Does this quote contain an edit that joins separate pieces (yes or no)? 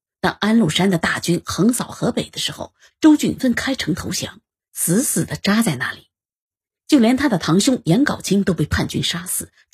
yes